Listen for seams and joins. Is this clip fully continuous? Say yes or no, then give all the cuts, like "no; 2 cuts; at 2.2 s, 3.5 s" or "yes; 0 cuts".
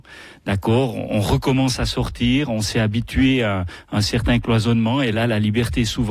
yes; 0 cuts